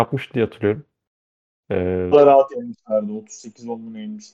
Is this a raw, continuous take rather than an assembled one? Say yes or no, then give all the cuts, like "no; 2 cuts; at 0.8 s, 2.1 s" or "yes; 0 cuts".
no; 1 cut; at 2.1 s